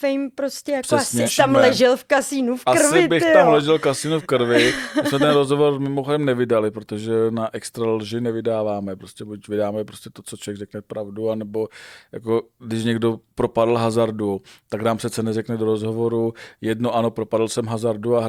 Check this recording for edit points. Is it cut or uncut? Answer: cut